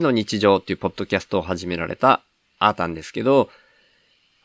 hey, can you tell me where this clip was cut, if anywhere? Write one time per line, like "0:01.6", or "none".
none